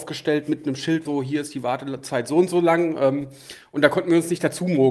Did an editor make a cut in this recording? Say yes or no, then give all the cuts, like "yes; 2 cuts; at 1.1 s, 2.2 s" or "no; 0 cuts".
yes; 1 cut; at 1.1 s